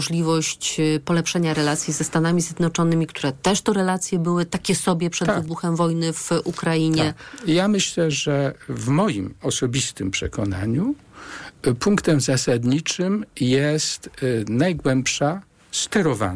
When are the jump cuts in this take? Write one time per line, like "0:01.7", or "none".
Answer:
none